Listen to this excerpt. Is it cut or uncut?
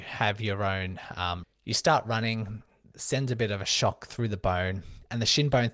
cut